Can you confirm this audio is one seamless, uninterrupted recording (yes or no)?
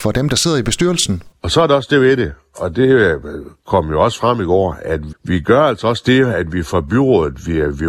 no